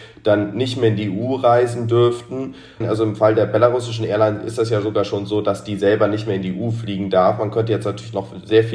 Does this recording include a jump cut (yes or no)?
yes